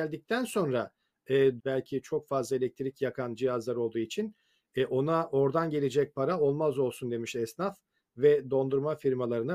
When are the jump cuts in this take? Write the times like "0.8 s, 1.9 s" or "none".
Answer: 1.6 s